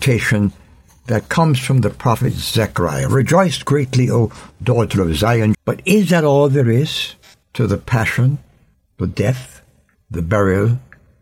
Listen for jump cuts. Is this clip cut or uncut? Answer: cut